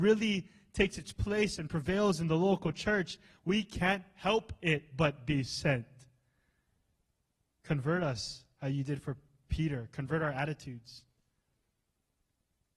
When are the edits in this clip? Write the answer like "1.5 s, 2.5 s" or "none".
7.5 s